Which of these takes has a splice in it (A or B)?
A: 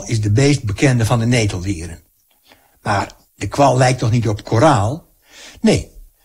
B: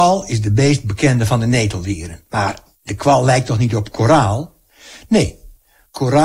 B